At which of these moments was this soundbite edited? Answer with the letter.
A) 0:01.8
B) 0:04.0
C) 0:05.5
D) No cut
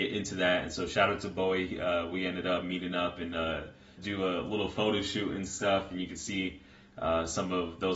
B